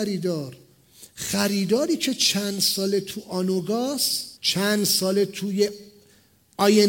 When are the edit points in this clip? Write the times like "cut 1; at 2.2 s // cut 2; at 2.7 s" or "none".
cut 1; at 4.4 s